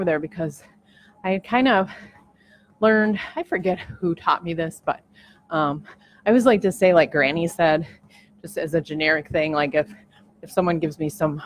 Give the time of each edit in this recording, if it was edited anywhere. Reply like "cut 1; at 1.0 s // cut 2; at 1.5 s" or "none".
none